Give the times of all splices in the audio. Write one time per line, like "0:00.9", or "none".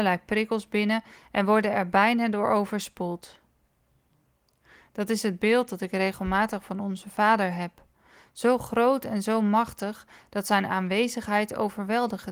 none